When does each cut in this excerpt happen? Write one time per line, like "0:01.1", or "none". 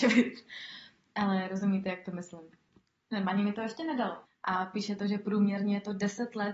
0:04.3